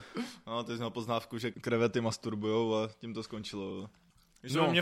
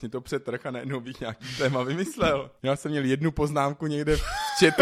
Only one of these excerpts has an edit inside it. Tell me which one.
second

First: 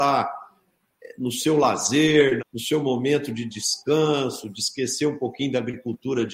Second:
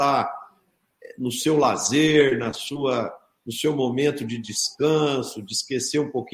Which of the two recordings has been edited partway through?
first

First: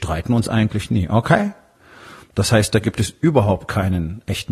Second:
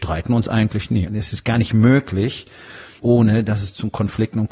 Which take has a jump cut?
second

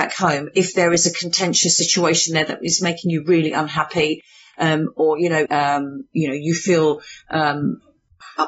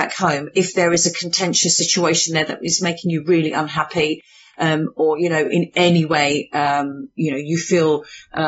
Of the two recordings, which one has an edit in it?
first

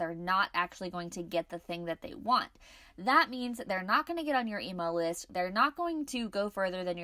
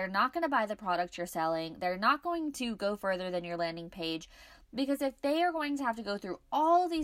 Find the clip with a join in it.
first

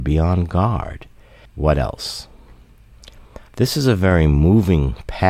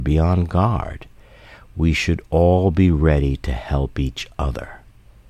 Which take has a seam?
first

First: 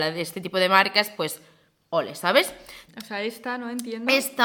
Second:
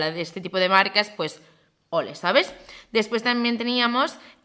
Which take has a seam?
first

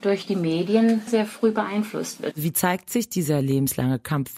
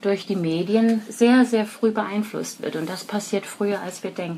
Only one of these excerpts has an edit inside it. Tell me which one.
first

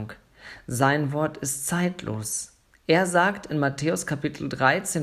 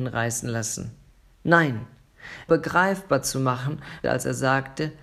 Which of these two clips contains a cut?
second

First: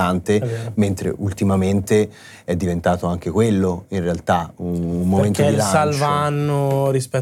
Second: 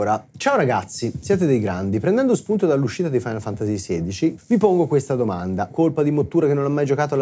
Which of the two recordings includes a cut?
second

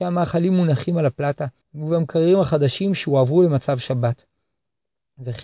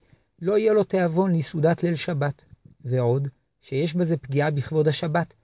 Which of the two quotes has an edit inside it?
first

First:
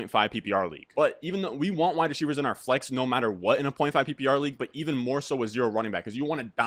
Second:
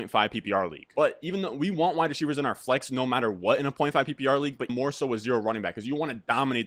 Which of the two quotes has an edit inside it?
second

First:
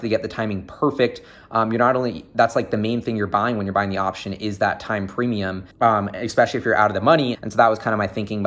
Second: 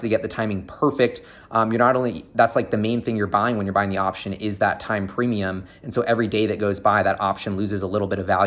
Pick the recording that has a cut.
first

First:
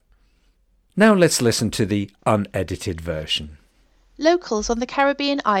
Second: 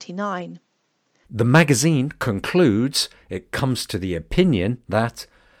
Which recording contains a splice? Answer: second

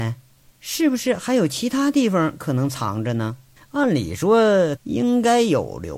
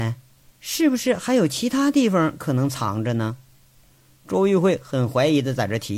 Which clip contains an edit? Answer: first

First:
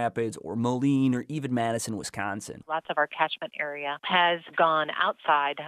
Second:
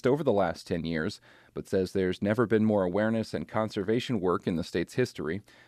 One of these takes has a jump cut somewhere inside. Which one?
first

